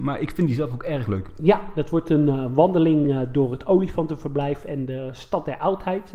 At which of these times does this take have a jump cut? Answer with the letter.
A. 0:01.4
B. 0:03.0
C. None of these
C